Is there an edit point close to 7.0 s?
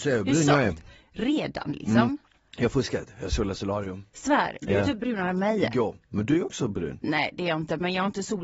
no; 0 cuts

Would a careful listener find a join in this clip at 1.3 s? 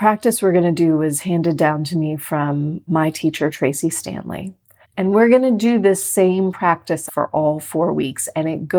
no; 3 cuts; at 2.9 s, 4.8 s, 7.1 s

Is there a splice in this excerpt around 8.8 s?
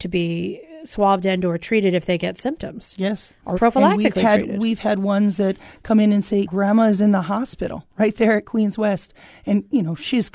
no; 2 cuts; at 3.5 s, 6.4 s

